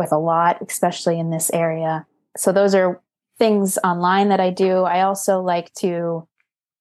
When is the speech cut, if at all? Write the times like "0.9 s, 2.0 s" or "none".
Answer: none